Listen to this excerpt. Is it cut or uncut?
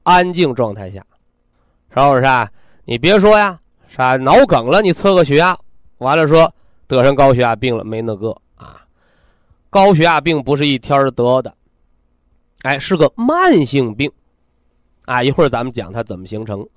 uncut